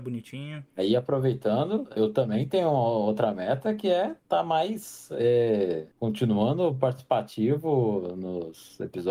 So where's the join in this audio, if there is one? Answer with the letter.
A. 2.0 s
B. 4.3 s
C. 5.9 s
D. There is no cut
A